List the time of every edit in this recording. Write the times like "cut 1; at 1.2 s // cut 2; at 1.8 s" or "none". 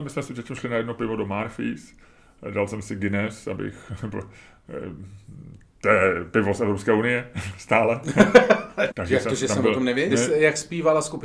cut 1; at 8.9 s // cut 2; at 10.1 s

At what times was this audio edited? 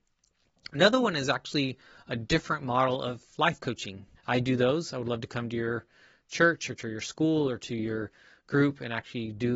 cut 1; at 4.2 s

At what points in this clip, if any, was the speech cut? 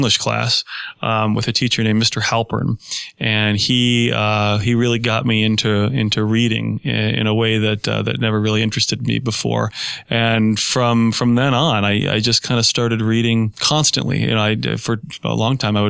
none

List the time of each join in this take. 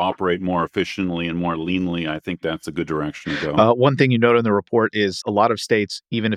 cut 1; at 5.2 s

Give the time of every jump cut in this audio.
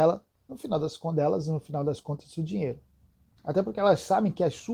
cut 1; at 3.4 s

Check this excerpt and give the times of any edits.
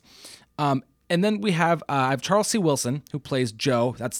none

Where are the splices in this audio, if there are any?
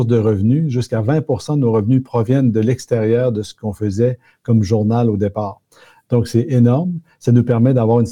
none

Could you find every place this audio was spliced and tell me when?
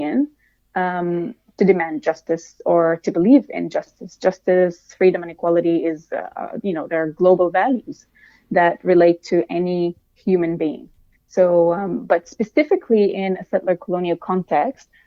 none

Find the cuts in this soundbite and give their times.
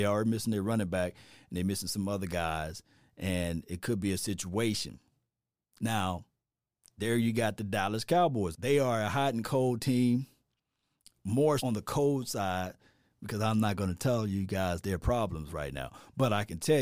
cut 1; at 8.5 s // cut 2; at 11.6 s

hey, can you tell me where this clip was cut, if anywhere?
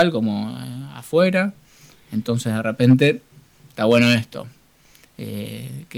none

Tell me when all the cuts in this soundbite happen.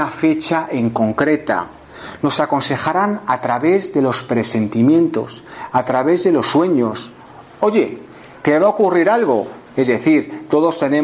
cut 1; at 9.7 s

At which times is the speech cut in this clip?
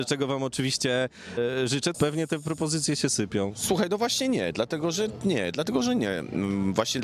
cut 1; at 1.9 s

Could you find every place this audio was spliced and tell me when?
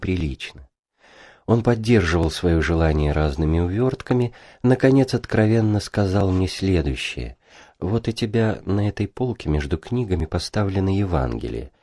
none

